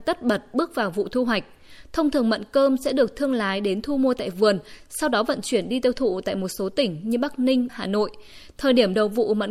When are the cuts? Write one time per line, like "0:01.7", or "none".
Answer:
0:07.7